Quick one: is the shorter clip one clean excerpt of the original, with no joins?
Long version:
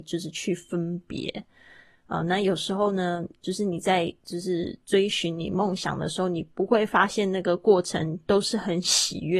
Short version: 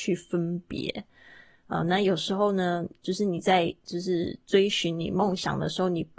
yes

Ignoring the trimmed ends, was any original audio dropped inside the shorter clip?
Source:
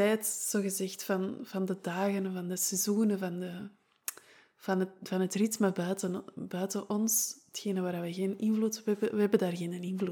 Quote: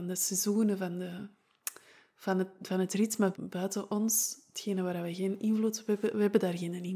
yes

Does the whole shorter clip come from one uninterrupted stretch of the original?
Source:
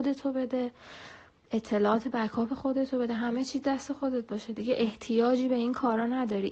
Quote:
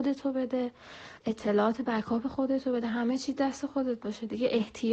no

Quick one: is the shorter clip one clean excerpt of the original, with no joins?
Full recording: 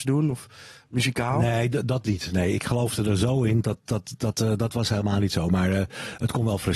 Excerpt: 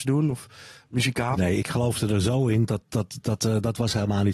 no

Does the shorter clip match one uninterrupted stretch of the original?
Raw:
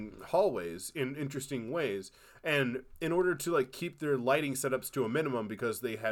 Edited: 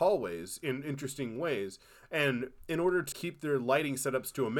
no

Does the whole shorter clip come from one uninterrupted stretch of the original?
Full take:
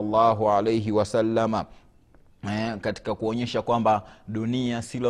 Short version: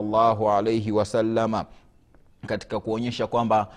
no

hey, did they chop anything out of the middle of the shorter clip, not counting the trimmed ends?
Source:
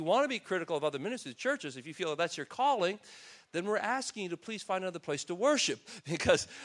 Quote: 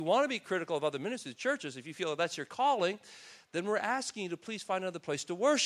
no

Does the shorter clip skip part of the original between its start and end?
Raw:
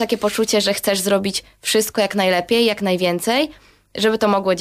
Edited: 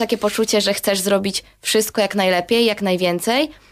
no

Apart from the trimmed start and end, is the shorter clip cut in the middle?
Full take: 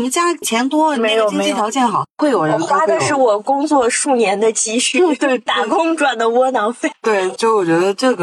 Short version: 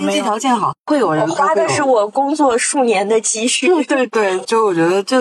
yes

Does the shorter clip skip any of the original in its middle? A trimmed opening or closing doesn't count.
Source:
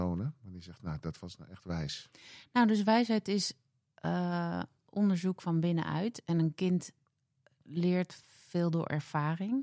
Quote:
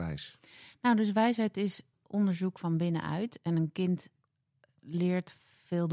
yes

